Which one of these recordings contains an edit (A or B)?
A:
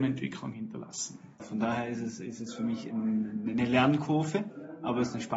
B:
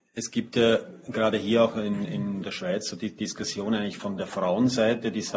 A